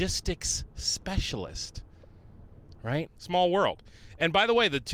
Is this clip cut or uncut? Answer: cut